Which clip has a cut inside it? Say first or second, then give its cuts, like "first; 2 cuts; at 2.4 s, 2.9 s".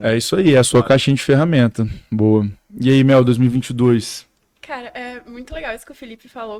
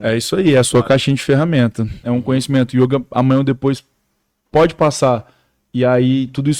second; 1 cut; at 2.0 s